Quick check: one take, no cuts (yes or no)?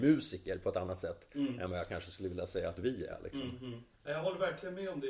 no